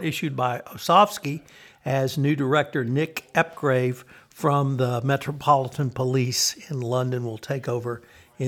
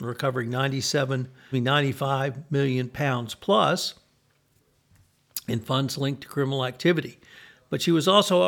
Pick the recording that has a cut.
second; 1 cut; at 1.5 s

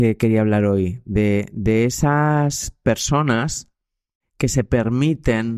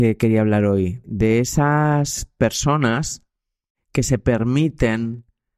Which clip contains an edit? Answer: second; 1 cut; at 1.0 s

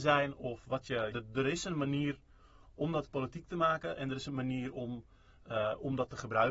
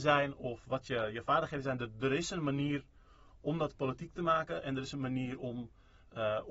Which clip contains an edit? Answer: first; 1 cut; at 1.1 s

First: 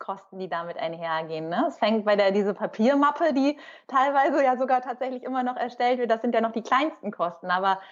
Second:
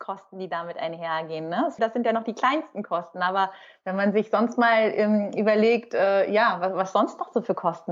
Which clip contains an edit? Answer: second; 1 cut; at 1.8 s

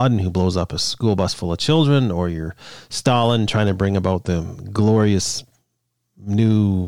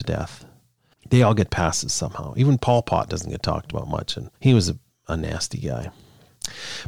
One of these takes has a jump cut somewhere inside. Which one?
second; 2 cuts; at 0.9 s, 4.4 s

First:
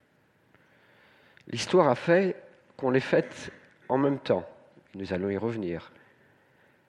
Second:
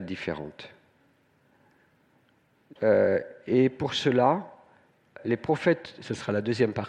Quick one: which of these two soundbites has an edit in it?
second; 2 cuts; at 2.8 s, 5.2 s

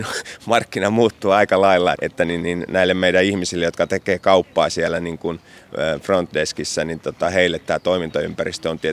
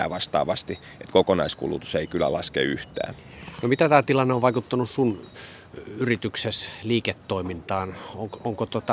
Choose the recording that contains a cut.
first; 1 cut; at 1.9 s

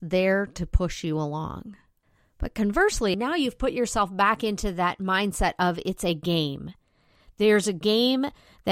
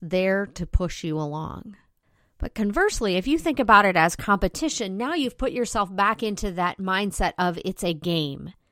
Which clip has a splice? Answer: first; 1 cut; at 3.1 s

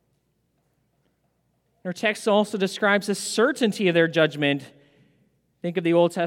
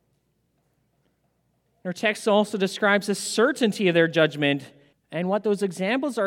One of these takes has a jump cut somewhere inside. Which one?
second; 1 cut; at 4.9 s

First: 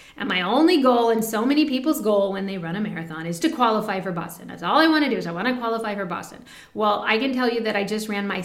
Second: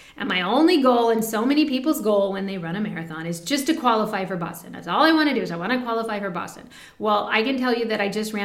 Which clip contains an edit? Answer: first; 1 cut; at 3.4 s

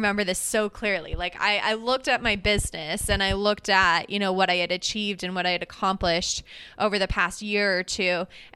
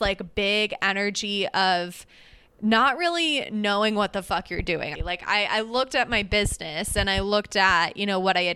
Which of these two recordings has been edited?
second; 1 cut; at 5.0 s

